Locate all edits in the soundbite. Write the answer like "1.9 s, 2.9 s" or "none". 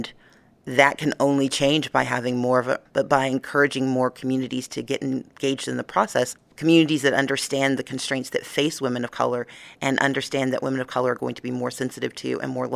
2.9 s